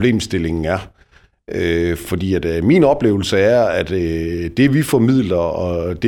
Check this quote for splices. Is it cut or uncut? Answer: uncut